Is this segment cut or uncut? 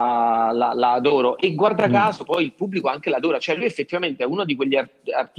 uncut